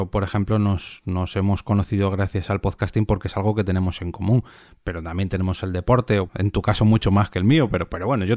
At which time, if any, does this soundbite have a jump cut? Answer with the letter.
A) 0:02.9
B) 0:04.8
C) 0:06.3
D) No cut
C